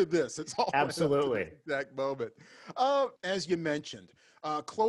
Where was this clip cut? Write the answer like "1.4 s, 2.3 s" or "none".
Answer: 3.2 s

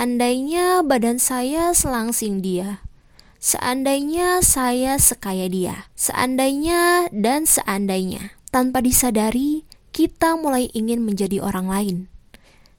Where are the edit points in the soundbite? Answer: 5.9 s, 8.4 s

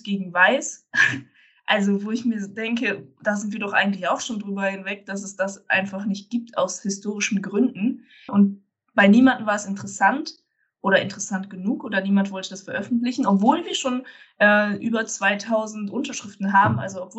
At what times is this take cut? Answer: 8.3 s

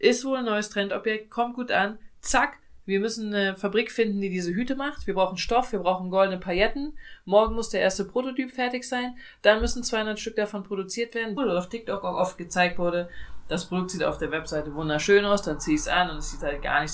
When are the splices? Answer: 11.4 s

